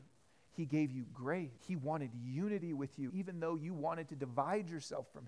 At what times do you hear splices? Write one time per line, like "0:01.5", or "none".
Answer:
0:01.6
0:03.1